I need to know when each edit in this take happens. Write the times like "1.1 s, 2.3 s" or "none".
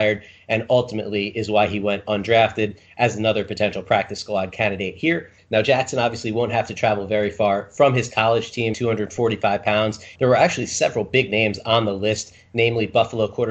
5.4 s, 8.7 s, 10.1 s